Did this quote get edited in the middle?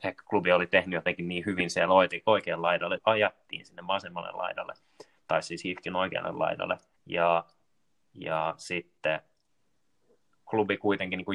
yes; 2 cuts; at 3.0 s, 7.0 s

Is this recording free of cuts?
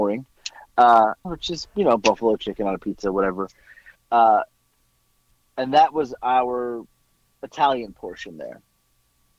no; 2 cuts; at 1.2 s, 4.0 s

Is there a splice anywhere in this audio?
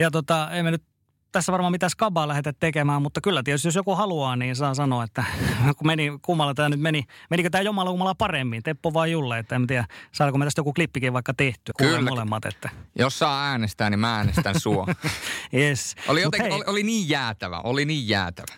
yes; 1 cut; at 11.7 s

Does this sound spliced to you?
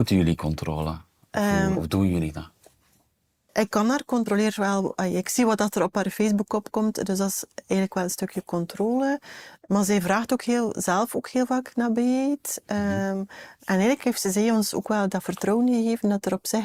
yes; 1 cut; at 1.7 s

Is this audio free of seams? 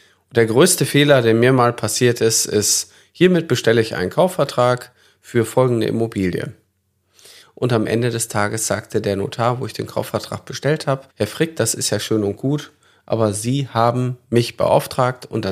no; 2 cuts; at 7.4 s, 11.1 s

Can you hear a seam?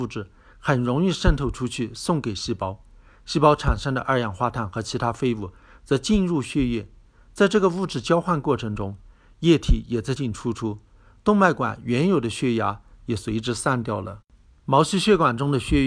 yes; 1 cut; at 10.2 s

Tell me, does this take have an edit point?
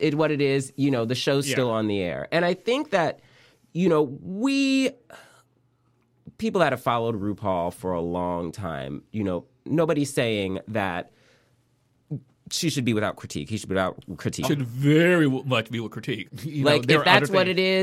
yes; 2 cuts; at 14.4 s, 16.3 s

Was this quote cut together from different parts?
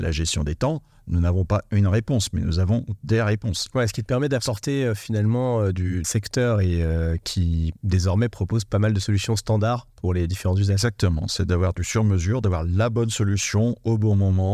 yes; 1 cut; at 6.0 s

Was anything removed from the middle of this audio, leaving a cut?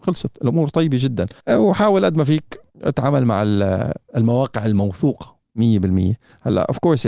yes; 2 cuts; at 1.4 s, 2.7 s

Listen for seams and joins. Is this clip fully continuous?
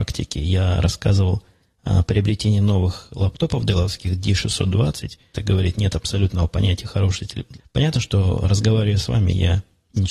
no; 2 cuts; at 5.3 s, 7.6 s

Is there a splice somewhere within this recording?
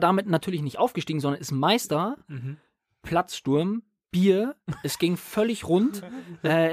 no; 0 cuts

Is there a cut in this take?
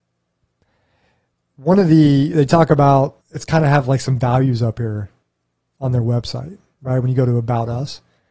yes; 1 cut; at 3.2 s

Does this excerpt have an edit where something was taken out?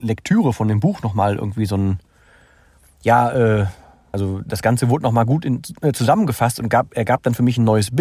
yes; 1 cut; at 4.1 s

